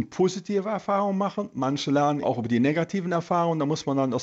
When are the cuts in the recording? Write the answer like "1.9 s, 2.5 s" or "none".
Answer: 2.2 s